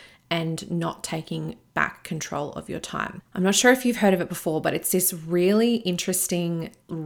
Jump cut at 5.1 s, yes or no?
no